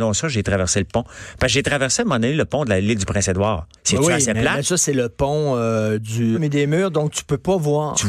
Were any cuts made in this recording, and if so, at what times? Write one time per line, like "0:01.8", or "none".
0:03.8
0:06.3